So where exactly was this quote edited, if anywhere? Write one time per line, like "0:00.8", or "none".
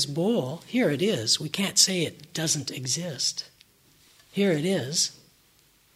none

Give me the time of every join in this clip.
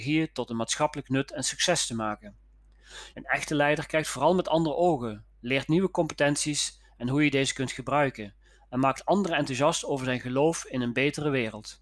0:03.1

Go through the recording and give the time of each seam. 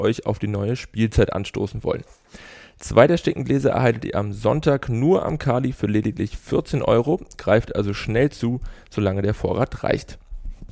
none

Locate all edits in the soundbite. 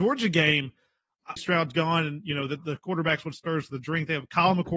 0:01.4

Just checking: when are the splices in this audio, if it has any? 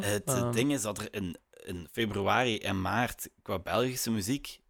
0:03.4

